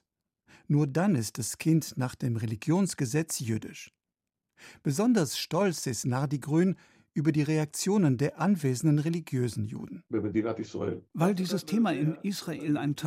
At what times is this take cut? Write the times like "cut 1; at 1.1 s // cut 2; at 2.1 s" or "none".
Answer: cut 1; at 10.1 s

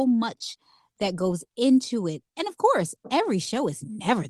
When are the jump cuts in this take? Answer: cut 1; at 2.2 s

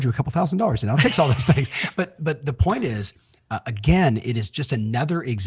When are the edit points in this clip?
none

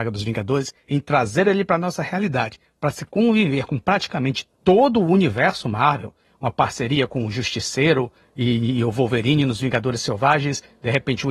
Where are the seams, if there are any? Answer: none

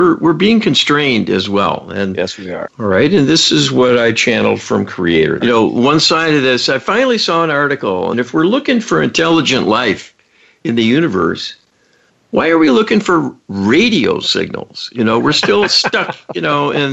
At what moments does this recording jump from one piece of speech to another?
cut 1; at 2.7 s // cut 2; at 5.4 s // cut 3; at 8.1 s

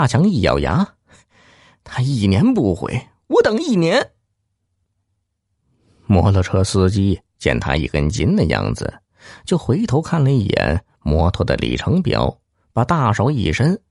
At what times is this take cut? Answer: none

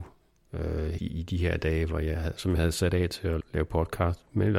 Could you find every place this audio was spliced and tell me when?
cut 1; at 1.0 s // cut 2; at 3.4 s

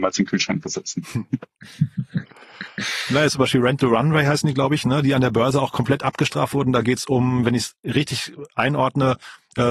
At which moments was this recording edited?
cut 1; at 3.3 s

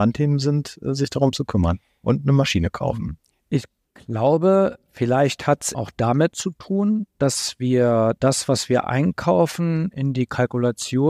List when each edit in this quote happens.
cut 1; at 5.7 s

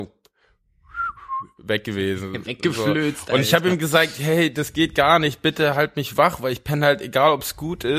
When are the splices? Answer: none

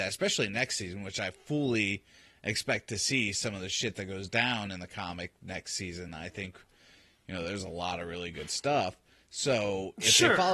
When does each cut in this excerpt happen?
none

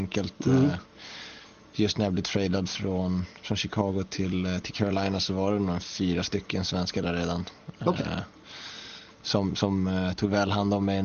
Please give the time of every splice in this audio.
none

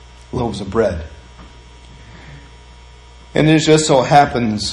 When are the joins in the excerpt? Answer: none

